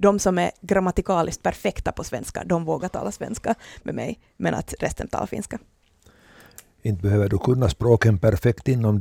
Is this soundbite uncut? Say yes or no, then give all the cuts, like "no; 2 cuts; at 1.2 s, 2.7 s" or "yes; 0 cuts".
yes; 0 cuts